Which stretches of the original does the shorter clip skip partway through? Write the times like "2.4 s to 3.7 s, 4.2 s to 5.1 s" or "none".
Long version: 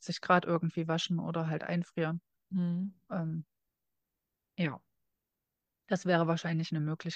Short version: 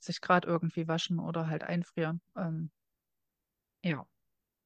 2.3 s to 3.0 s